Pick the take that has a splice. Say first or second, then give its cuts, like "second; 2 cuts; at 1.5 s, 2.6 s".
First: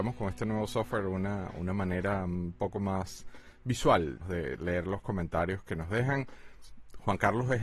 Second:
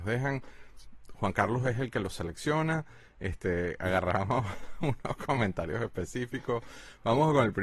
first; 1 cut; at 4.2 s